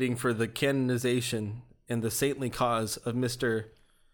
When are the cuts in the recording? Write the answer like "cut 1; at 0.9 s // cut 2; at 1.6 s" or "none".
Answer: none